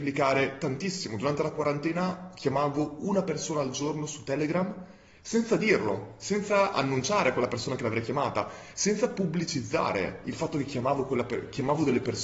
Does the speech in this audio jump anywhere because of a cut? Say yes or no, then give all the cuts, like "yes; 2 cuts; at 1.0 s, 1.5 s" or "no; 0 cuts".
no; 0 cuts